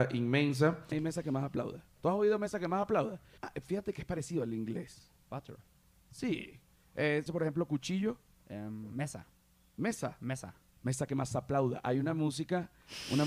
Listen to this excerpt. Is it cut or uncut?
cut